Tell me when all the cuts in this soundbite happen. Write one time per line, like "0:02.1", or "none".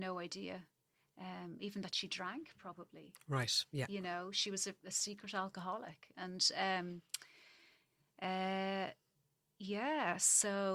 none